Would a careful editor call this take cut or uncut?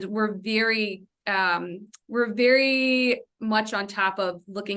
cut